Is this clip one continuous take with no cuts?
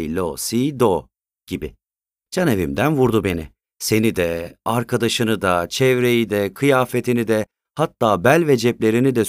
no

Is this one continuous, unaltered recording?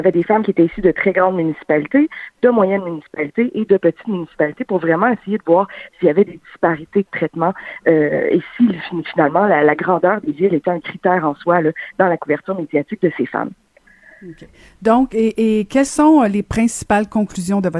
yes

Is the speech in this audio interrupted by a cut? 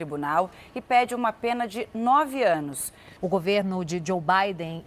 yes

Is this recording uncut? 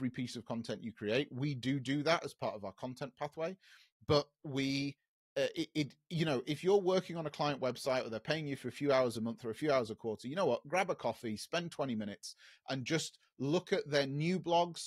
yes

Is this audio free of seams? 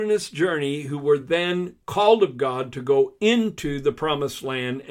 yes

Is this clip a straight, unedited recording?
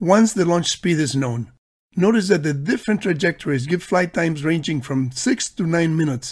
yes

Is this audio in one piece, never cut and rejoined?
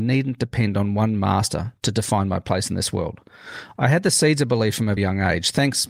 no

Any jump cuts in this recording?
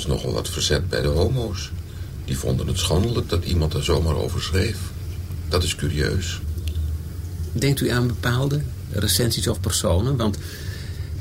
no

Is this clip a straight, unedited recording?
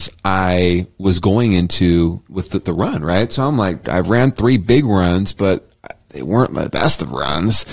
no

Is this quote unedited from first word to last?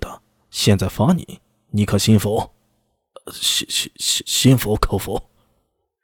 yes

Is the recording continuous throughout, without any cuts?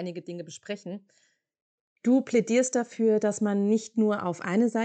no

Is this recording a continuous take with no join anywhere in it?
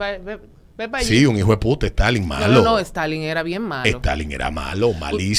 yes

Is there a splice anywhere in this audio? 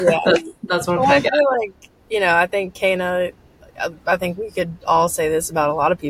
no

